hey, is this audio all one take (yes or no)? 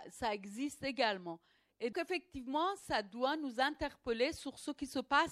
no